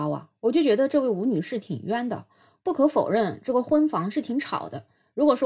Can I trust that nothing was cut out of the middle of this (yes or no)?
yes